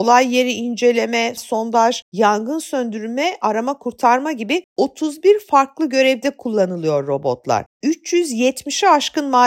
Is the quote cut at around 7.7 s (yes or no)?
yes